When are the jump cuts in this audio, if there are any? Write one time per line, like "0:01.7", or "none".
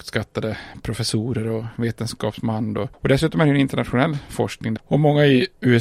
0:04.8